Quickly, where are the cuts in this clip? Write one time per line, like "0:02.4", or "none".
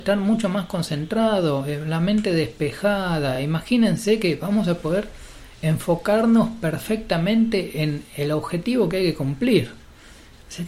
none